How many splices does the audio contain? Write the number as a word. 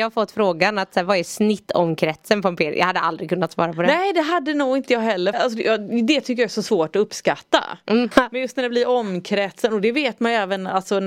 two